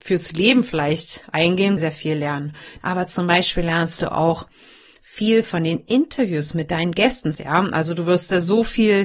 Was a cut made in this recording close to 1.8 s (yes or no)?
yes